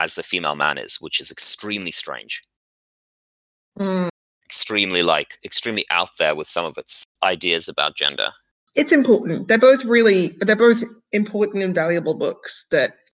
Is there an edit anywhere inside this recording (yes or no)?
no